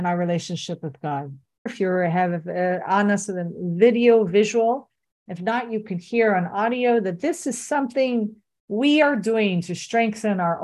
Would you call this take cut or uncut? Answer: cut